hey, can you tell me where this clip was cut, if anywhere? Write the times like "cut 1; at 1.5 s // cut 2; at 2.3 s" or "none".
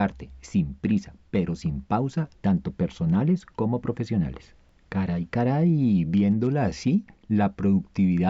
cut 1; at 2.3 s